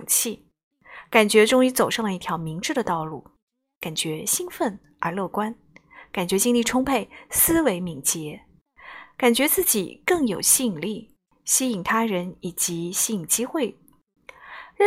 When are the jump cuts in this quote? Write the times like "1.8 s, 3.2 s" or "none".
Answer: none